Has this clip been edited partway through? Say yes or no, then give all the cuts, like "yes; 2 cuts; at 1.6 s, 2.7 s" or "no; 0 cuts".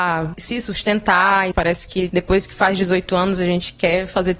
yes; 1 cut; at 1.5 s